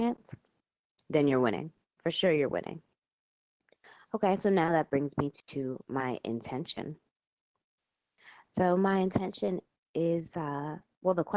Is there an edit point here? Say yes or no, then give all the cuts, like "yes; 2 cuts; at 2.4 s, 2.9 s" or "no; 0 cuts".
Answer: no; 0 cuts